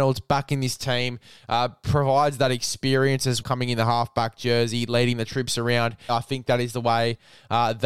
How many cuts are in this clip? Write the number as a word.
two